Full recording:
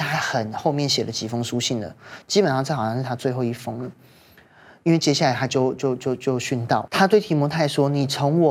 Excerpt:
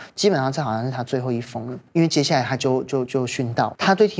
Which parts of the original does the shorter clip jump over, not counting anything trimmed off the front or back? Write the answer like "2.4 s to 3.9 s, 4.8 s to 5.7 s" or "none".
4.0 s to 4.8 s, 6.0 s to 6.2 s